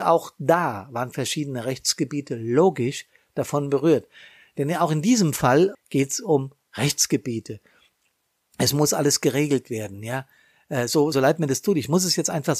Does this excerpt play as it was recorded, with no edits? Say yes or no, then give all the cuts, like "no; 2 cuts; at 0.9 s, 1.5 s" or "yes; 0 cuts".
no; 2 cuts; at 5.7 s, 11.1 s